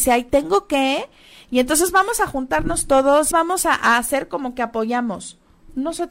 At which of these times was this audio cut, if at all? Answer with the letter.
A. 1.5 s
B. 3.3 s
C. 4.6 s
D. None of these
B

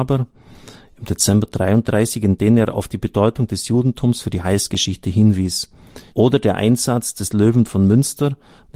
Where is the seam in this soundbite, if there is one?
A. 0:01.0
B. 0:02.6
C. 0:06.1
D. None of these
C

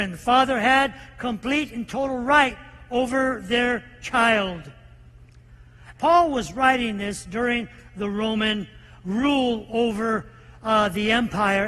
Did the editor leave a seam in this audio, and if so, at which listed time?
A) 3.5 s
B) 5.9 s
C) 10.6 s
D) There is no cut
B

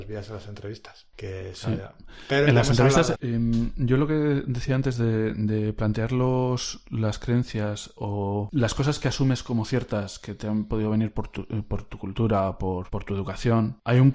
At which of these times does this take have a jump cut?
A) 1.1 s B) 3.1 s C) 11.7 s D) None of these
B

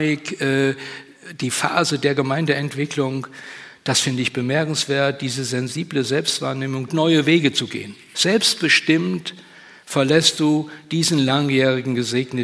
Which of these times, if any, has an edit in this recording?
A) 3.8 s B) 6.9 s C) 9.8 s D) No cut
B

